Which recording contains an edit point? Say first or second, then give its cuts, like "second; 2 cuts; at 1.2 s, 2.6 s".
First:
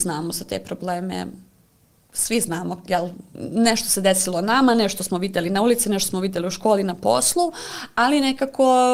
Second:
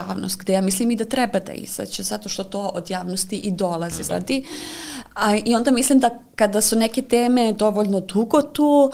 second; 1 cut; at 4.1 s